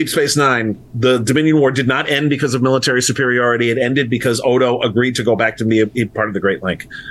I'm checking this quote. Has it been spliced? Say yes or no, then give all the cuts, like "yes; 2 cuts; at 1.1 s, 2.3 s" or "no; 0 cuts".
no; 0 cuts